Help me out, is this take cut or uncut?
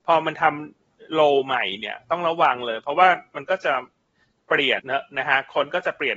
cut